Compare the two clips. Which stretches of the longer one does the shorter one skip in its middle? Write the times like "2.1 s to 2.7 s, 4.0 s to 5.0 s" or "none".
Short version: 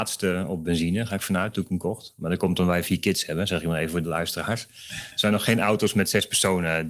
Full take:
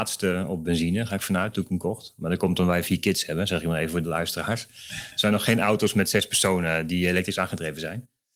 none